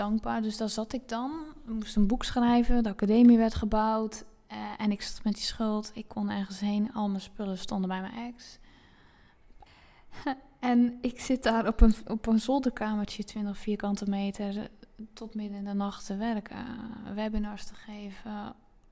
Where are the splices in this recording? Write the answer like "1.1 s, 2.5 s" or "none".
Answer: 9.7 s